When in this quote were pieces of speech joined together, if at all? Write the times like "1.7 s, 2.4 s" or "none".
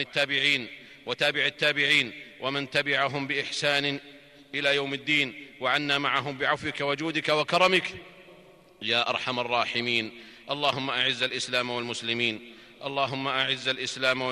none